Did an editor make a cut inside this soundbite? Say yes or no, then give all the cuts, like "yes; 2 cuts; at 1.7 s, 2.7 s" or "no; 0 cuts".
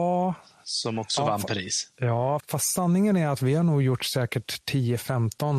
yes; 1 cut; at 2.4 s